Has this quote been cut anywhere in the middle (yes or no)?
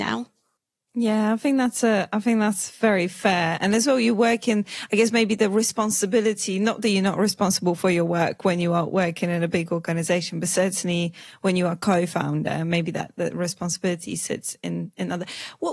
no